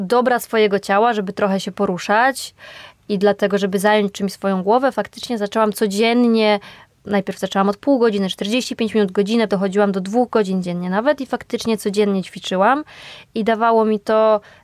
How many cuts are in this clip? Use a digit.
1